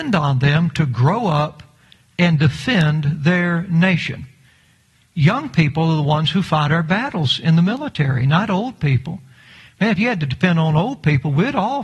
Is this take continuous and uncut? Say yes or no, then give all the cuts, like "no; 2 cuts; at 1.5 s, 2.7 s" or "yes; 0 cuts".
yes; 0 cuts